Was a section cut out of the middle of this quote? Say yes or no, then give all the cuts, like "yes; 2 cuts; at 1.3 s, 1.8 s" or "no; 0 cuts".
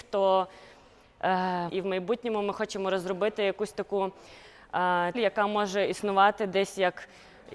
yes; 2 cuts; at 1.7 s, 5.1 s